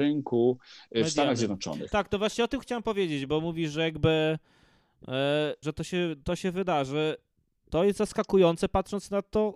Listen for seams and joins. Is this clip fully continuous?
no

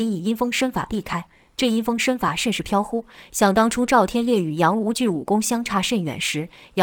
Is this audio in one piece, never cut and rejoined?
yes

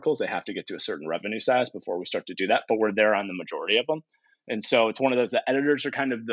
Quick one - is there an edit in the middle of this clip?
no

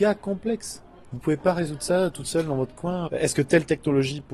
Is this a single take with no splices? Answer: no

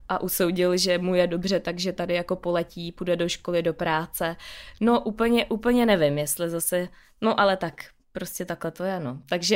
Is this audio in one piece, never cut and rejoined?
yes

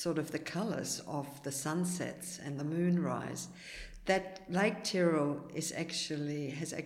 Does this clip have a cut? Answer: no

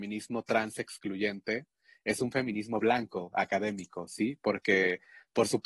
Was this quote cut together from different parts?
no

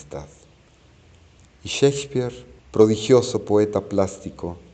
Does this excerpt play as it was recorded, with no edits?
no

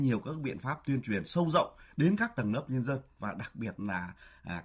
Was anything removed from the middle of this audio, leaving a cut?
no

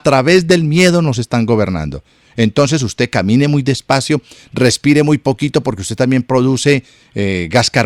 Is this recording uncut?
yes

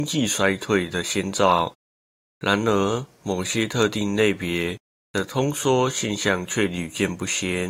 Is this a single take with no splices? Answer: yes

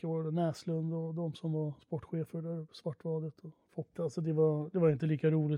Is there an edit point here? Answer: yes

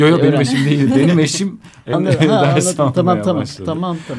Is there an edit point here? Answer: yes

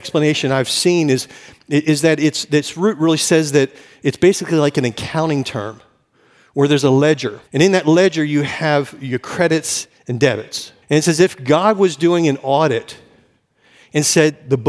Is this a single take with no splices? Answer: no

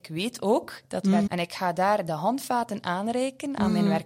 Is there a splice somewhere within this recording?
yes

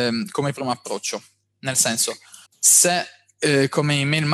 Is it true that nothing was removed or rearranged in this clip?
no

